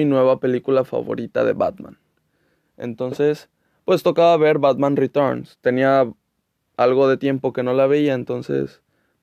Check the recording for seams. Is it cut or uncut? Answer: uncut